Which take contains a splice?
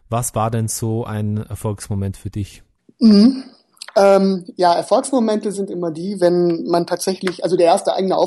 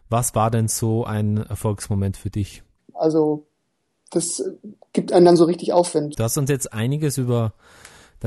second; 2 cuts; at 2.9 s, 6.1 s

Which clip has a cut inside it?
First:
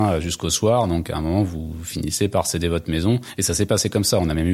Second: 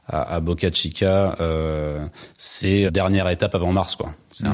second; 1 cut; at 2.9 s

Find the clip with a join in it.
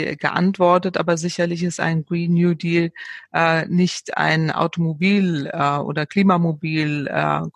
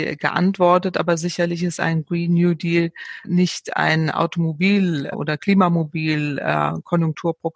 second; 2 cuts; at 3.2 s, 5.1 s

